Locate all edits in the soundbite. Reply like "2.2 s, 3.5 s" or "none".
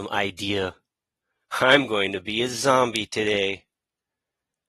none